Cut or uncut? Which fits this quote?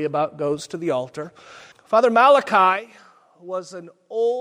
cut